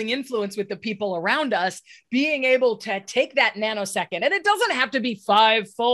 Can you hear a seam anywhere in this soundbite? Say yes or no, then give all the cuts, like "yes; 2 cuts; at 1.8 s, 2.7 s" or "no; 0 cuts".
no; 0 cuts